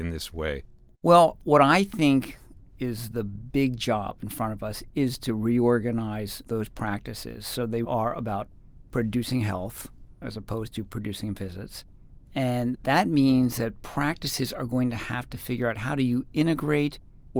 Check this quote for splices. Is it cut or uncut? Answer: cut